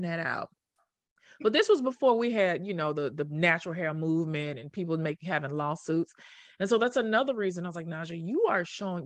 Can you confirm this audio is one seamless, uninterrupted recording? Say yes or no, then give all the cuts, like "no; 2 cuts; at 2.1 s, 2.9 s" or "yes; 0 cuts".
yes; 0 cuts